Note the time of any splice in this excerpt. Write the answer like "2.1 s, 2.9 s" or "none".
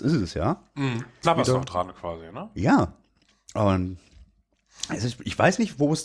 1.2 s